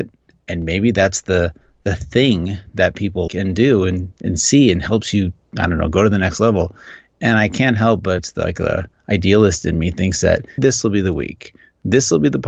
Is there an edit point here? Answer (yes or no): yes